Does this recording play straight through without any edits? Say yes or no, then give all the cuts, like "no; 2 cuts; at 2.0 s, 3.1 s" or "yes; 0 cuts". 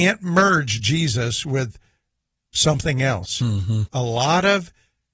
no; 1 cut; at 3.9 s